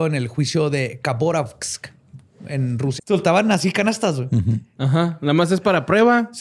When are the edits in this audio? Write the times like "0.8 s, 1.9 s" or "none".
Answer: 3.0 s, 4.8 s

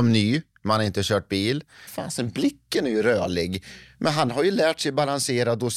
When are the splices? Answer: 1.9 s

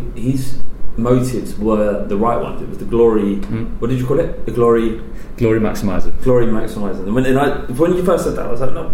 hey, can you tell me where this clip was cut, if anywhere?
none

